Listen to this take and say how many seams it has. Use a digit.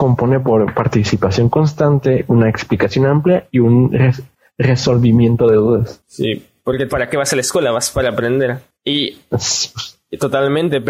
1